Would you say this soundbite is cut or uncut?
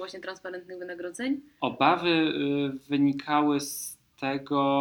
uncut